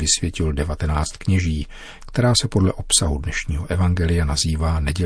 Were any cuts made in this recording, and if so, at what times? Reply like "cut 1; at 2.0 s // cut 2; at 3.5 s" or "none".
cut 1; at 2.0 s